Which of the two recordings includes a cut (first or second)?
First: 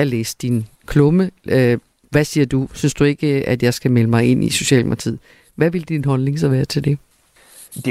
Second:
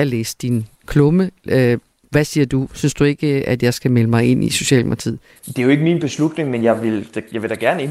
second